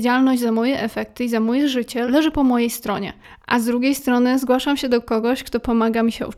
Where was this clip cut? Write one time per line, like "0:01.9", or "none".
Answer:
0:02.0